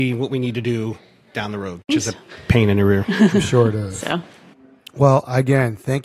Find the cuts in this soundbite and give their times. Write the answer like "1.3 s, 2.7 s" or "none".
1.9 s